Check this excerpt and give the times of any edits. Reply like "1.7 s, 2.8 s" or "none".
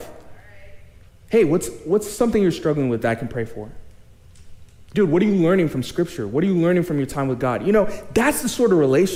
1.1 s